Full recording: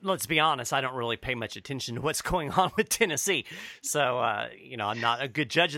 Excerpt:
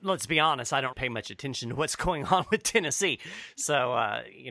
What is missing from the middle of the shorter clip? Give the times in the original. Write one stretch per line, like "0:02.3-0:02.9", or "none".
0:00.9-0:01.2